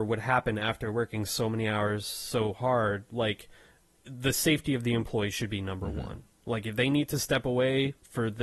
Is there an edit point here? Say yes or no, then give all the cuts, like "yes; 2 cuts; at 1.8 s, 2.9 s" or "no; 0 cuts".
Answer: no; 0 cuts